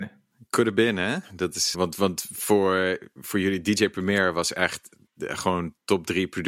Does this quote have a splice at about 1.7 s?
yes; 1 cut; at 1.7 s

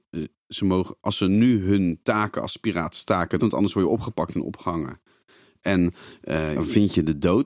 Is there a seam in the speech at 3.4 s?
yes; 2 cuts; at 3.4 s, 6.5 s

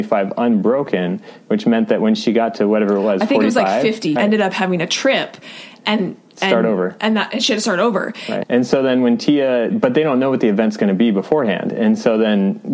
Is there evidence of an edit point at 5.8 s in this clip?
no; 3 cuts; at 4.2 s, 8.4 s, 9.7 s

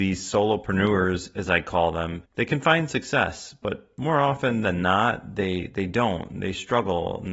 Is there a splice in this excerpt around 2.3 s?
yes; 1 cut; at 2.3 s

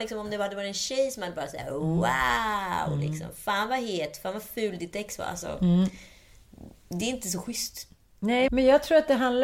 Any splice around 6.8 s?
no; 1 cut; at 8.5 s

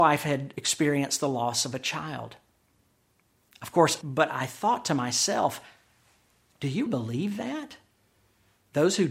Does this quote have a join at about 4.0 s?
yes; 2 cuts; at 4.0 s, 6.9 s

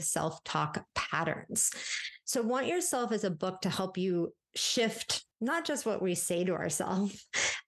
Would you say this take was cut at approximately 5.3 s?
yes; 1 cut; at 5.3 s

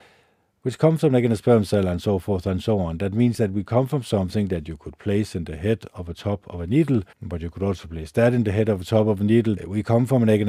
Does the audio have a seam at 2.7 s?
no; 2 cuts; at 7.1 s, 9.6 s

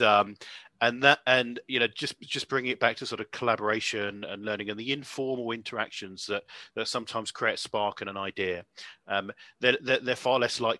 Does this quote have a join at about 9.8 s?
no; 0 cuts

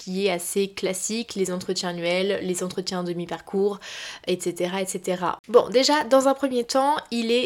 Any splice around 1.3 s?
no; 1 cut; at 5.4 s

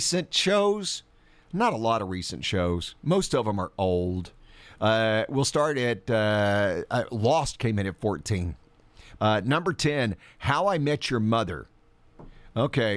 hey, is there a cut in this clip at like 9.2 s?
yes; 1 cut; at 9.2 s

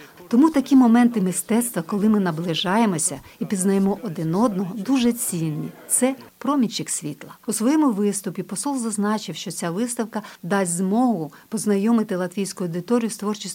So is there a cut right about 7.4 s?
yes; 1 cut; at 7.4 s

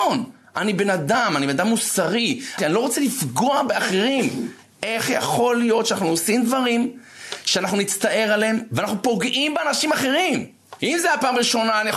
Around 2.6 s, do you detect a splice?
yes; 2 cuts; at 2.6 s, 10.8 s

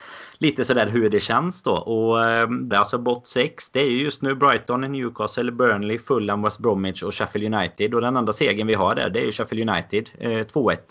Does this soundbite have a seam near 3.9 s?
no; 1 cut; at 2.7 s

